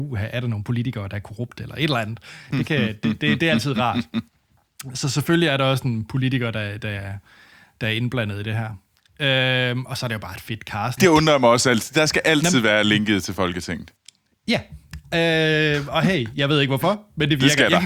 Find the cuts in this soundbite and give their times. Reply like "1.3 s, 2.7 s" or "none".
11.0 s